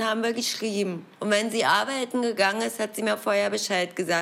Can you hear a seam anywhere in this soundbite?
yes; 1 cut; at 1.1 s

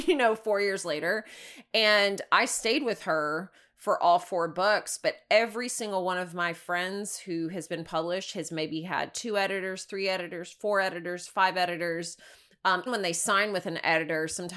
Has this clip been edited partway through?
yes; 1 cut; at 12.9 s

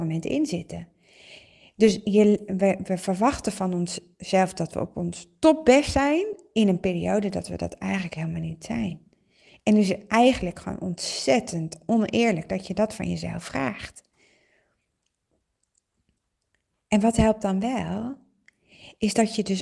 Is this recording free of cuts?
yes; 0 cuts

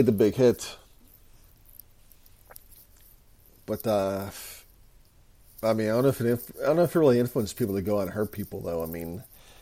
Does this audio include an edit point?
no; 0 cuts

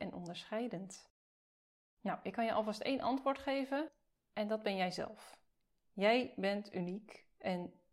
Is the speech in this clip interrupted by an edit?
no; 0 cuts

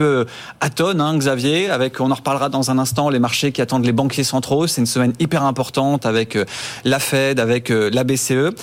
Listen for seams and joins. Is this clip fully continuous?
yes; 0 cuts

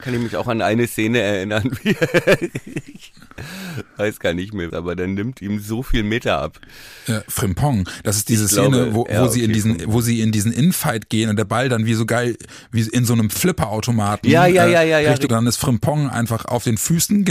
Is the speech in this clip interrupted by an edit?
yes; 2 cuts; at 4.7 s, 15.3 s

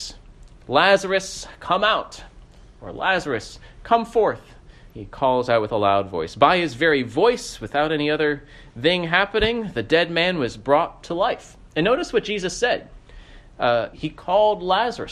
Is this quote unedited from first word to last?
no; 2 cuts; at 4.9 s, 13.9 s

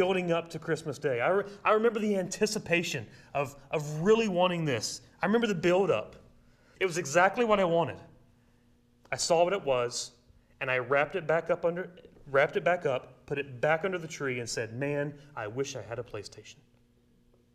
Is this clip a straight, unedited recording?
no; 1 cut; at 6.8 s

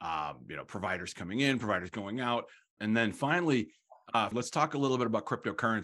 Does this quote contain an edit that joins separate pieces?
yes; 2 cuts; at 2.8 s, 4.3 s

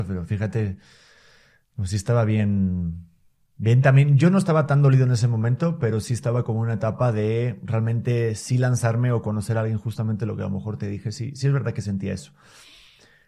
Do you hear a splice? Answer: no; 0 cuts

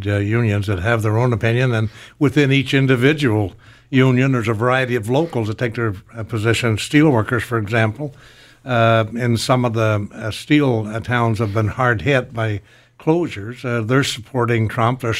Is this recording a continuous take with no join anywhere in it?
yes; 0 cuts

